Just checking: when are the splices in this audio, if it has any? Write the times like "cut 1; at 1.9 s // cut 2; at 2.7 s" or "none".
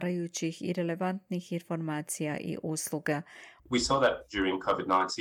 cut 1; at 3.6 s